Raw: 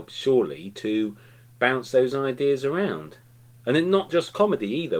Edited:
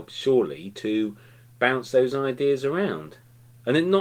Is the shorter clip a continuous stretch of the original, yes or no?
yes